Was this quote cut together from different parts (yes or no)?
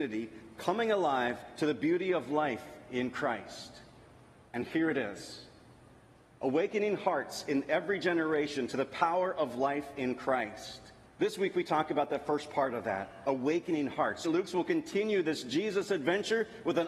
yes